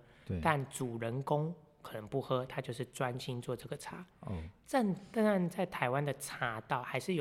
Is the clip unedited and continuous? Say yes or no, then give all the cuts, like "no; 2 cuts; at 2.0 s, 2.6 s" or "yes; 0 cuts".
yes; 0 cuts